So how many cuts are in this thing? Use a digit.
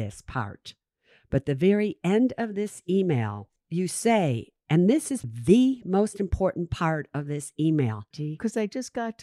2